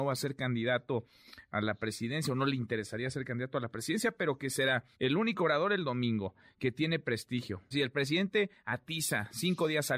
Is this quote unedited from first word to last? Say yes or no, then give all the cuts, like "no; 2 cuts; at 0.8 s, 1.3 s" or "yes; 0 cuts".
no; 2 cuts; at 4.9 s, 7.7 s